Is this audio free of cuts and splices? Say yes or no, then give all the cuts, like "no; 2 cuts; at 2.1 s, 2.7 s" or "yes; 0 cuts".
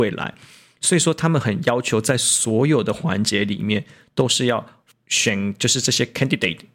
no; 1 cut; at 4.9 s